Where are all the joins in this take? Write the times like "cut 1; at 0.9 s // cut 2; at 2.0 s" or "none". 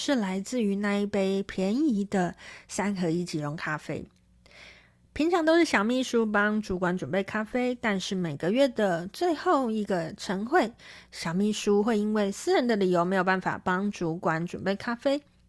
none